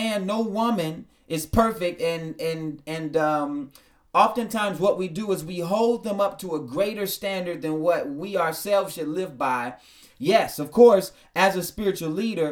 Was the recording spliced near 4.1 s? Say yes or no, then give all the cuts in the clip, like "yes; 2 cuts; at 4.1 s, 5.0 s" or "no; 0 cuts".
no; 1 cut; at 10.1 s